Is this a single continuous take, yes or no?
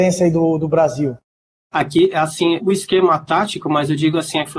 no